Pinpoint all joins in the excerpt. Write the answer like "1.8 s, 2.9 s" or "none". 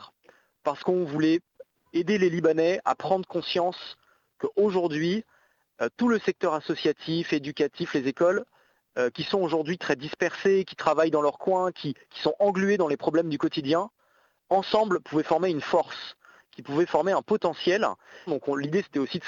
14.4 s, 18.3 s